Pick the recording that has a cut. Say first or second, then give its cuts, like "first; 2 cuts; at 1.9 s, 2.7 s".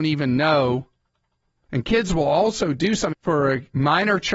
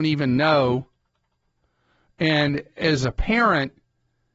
first; 2 cuts; at 1.7 s, 3.1 s